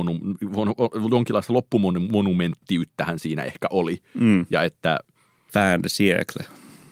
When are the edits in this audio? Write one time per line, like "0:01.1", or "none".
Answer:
0:05.5